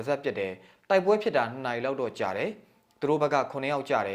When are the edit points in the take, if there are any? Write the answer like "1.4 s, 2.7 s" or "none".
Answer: none